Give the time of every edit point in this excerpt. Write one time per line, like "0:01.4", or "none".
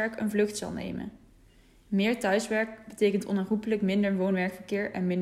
none